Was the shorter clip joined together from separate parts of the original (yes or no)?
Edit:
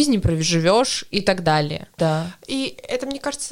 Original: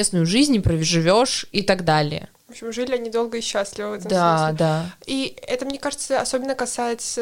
yes